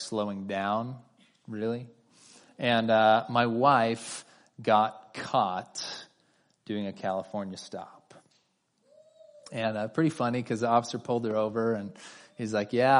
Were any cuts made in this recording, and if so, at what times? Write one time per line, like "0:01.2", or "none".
none